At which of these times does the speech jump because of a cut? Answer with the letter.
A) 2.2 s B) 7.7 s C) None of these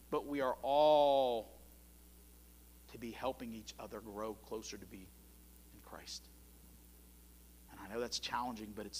C